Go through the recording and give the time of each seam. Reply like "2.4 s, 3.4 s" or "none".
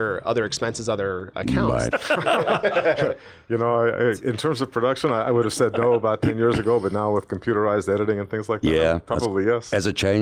1.9 s